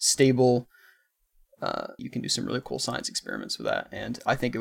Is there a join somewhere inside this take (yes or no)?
yes